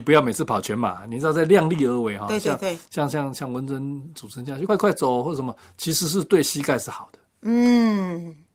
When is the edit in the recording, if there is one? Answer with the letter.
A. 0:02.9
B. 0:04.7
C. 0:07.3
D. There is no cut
B